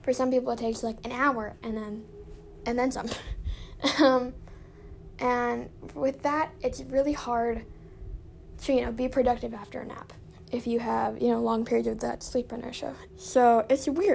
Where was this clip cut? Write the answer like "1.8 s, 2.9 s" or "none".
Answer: 13.1 s